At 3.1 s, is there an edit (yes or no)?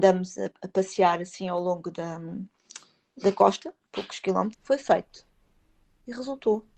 no